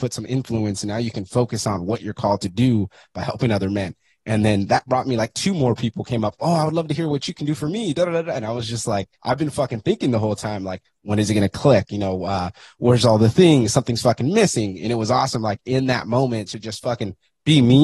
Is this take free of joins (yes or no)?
no